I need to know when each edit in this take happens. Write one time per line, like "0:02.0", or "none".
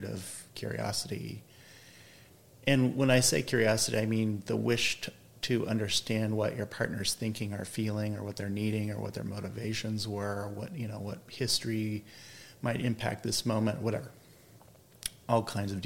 none